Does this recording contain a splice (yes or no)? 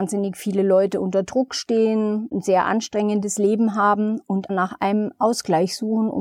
yes